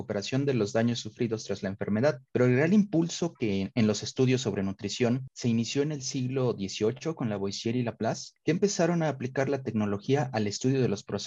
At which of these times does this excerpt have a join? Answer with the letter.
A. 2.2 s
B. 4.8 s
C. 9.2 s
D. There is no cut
A